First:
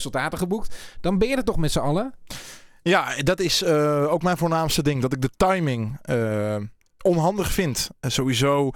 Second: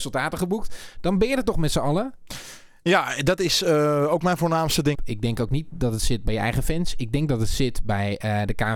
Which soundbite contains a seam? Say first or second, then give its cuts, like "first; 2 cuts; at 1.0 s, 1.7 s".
second; 1 cut; at 4.9 s